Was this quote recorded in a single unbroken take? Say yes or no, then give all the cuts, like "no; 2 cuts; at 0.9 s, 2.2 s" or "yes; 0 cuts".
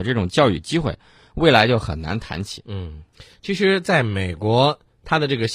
yes; 0 cuts